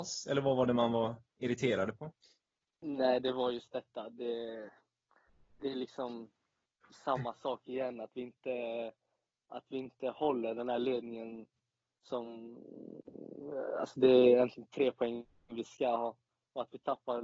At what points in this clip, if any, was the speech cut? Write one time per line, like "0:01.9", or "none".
none